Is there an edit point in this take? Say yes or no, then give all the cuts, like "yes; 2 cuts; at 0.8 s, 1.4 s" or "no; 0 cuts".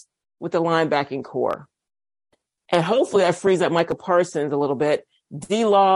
no; 0 cuts